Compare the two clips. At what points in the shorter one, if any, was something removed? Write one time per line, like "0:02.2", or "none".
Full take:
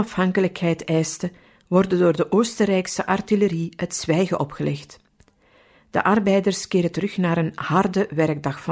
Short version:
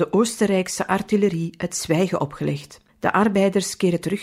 0:02.9